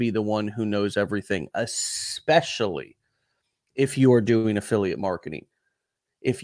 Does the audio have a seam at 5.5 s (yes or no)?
no